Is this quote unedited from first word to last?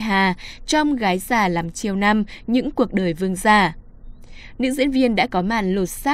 no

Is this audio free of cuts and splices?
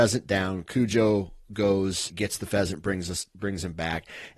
no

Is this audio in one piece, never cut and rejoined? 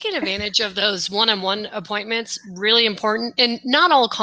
yes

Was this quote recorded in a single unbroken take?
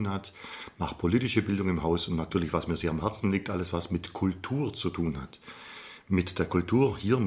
yes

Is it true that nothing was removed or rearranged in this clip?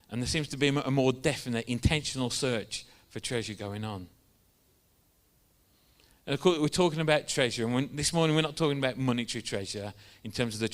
yes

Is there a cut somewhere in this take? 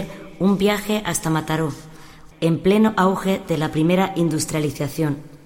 yes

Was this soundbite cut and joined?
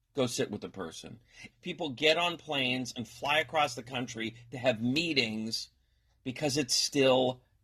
yes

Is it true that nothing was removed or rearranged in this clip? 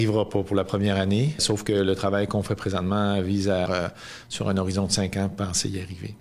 no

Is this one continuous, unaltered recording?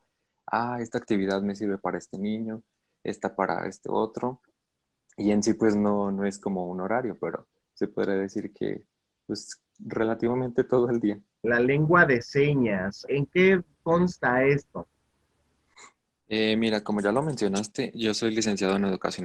no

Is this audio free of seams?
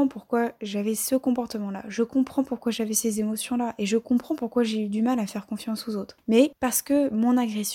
yes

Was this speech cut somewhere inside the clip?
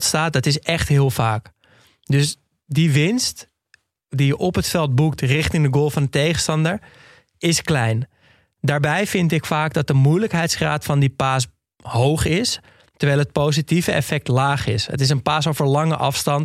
no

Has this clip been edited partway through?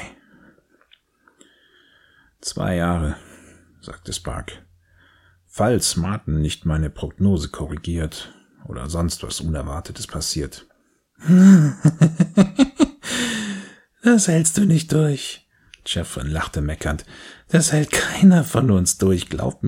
no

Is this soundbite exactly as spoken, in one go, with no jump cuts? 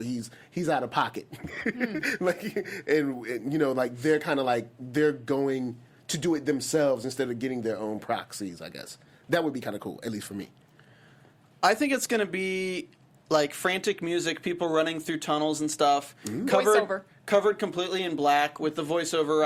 yes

